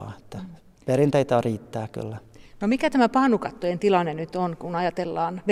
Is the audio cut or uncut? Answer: uncut